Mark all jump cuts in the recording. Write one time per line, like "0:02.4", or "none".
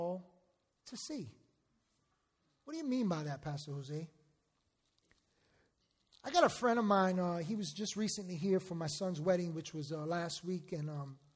none